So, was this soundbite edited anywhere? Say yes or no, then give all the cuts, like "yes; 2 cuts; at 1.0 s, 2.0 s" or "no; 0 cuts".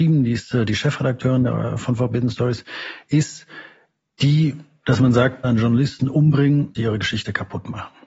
yes; 2 cuts; at 5.4 s, 6.7 s